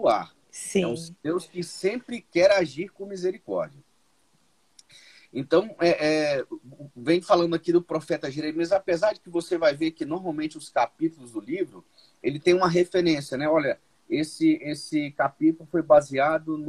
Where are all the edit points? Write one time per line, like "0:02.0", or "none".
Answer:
none